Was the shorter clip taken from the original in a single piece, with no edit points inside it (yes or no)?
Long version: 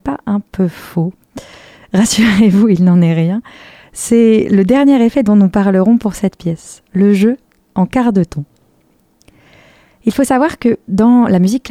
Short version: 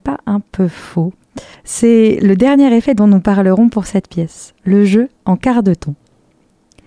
no